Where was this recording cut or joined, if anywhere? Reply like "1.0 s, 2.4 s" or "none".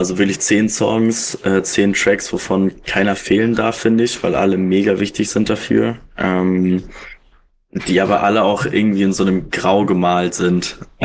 2.8 s